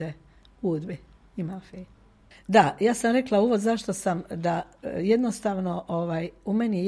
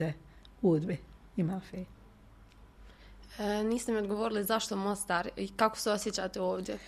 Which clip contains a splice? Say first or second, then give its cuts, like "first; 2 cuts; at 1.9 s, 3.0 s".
first; 1 cut; at 2.3 s